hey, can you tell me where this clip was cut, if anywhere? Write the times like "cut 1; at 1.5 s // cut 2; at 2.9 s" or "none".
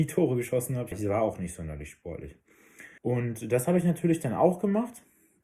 cut 1; at 0.9 s // cut 2; at 3.0 s